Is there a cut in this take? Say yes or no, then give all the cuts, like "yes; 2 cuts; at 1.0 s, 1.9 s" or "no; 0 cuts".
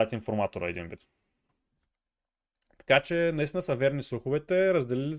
no; 0 cuts